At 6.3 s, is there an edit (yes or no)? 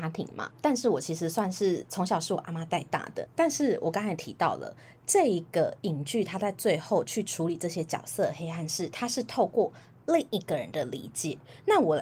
no